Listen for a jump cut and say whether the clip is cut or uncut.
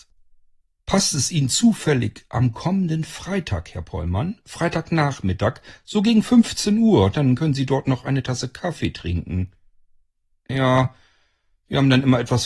uncut